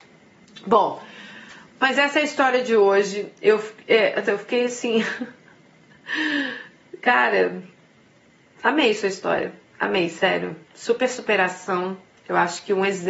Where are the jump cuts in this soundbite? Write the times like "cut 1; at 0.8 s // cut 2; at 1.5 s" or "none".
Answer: cut 1; at 4.3 s